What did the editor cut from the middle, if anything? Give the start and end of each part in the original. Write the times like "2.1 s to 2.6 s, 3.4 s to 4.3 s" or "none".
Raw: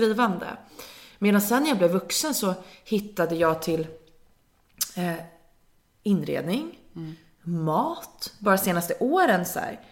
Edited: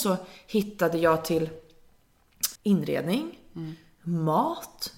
4.9 s to 6.0 s